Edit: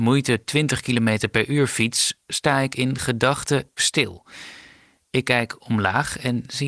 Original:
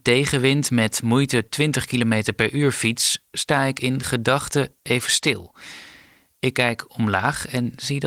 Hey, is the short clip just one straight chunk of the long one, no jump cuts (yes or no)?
no